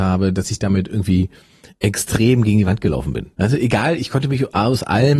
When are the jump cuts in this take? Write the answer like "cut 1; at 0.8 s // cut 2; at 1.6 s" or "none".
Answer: cut 1; at 3.4 s

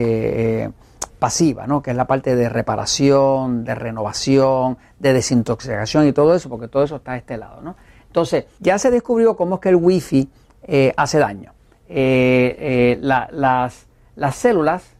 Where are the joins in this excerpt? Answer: cut 1; at 1.1 s // cut 2; at 8.6 s

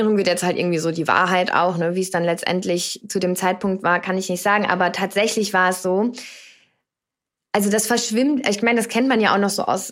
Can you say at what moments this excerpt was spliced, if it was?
none

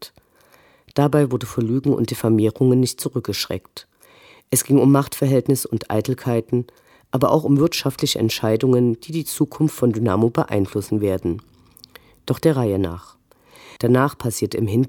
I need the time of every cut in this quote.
cut 1; at 13.8 s

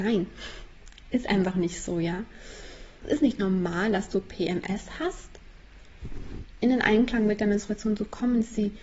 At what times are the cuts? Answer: cut 1; at 3.0 s // cut 2; at 6.6 s

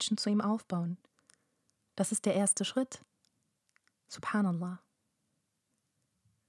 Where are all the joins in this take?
none

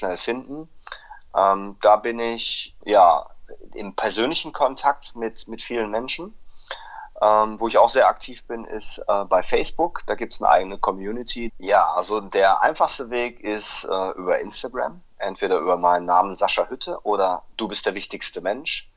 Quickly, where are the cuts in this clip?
cut 1; at 2.8 s // cut 2; at 11.5 s

